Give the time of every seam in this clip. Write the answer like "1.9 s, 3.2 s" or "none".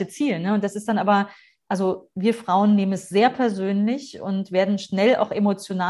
none